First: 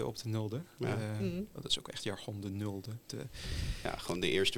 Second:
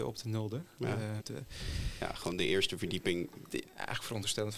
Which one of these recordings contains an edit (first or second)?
second